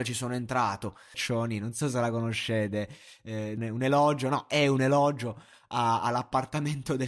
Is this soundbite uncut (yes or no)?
no